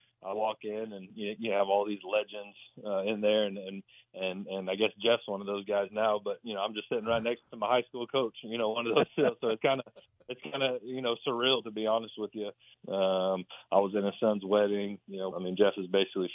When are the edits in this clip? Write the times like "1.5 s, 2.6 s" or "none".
12.7 s, 15.3 s

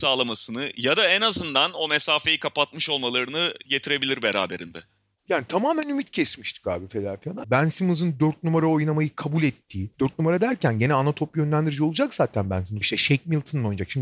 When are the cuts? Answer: 7.4 s, 9.9 s, 12.8 s

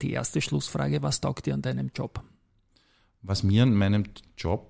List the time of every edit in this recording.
none

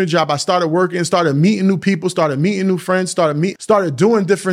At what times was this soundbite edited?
3.5 s

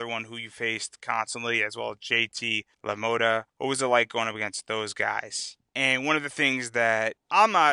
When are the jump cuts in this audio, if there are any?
5.7 s

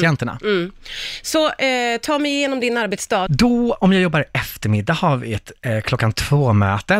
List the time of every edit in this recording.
3.3 s

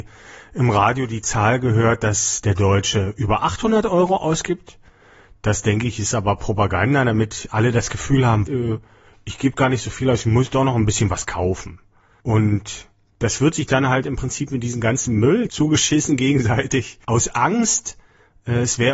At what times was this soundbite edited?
8.5 s, 17.0 s

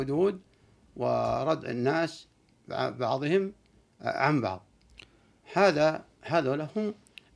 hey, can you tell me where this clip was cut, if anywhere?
none

